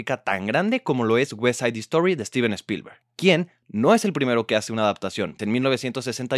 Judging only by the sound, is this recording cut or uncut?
cut